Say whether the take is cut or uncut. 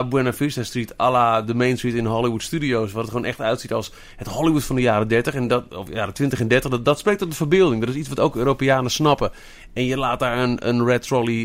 uncut